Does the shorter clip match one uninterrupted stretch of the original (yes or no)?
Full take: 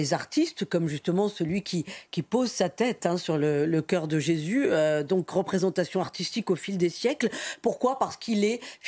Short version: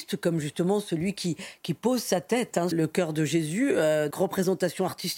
no